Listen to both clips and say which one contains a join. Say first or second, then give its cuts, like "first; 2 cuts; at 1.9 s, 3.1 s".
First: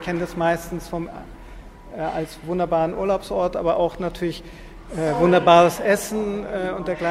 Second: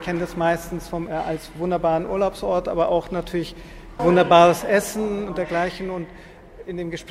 second; 3 cuts; at 1.1 s, 4.0 s, 5.3 s